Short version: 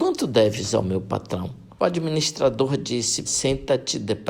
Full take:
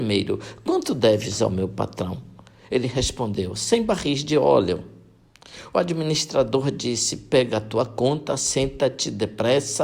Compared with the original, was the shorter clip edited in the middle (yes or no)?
yes